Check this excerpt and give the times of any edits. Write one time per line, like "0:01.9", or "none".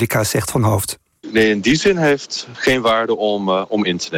0:01.2